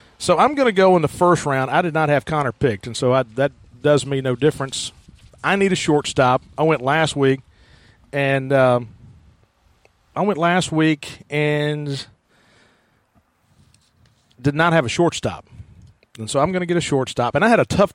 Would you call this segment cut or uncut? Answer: uncut